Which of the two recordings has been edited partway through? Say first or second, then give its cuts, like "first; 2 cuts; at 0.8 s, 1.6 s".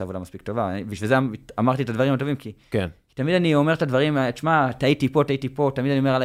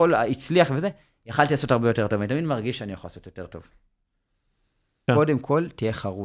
second; 1 cut; at 5.1 s